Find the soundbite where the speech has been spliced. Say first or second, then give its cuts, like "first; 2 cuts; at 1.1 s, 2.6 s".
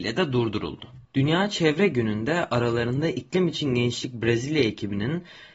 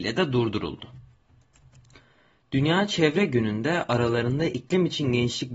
first; 1 cut; at 1.0 s